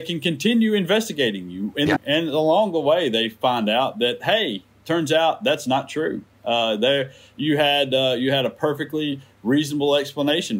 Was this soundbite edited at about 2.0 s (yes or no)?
yes